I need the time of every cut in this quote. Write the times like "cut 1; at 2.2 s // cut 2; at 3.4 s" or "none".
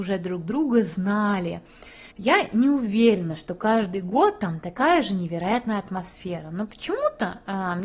cut 1; at 2.1 s